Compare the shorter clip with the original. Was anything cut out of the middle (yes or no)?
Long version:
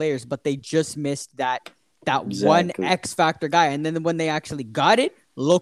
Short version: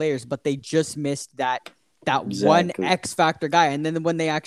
no